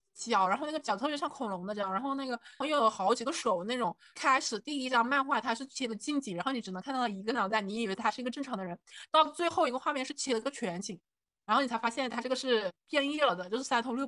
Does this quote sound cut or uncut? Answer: cut